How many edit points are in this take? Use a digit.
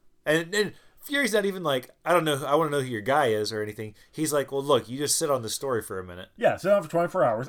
0